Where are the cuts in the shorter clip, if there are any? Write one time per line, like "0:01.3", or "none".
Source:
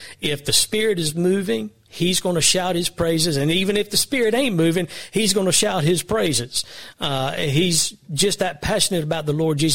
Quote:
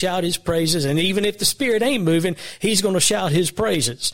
none